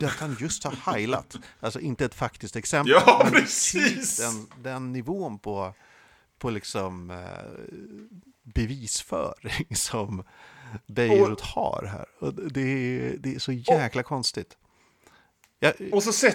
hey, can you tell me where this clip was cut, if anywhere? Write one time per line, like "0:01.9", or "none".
none